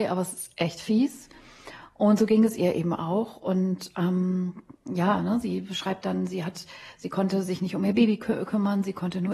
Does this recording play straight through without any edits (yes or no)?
yes